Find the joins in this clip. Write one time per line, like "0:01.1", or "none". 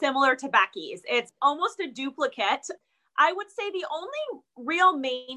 0:01.4

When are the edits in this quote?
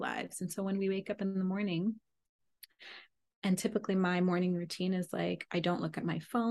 none

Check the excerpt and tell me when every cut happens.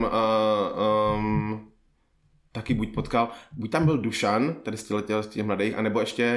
none

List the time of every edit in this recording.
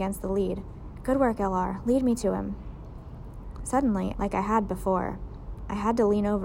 0:04.1

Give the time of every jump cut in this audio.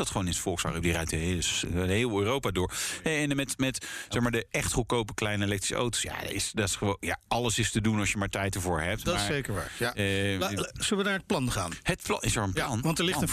none

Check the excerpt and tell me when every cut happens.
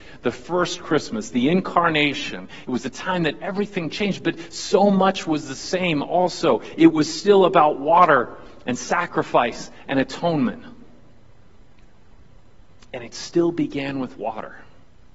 none

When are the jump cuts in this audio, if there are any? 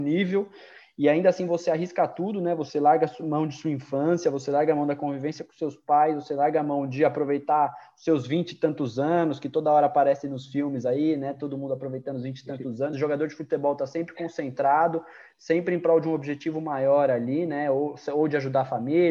none

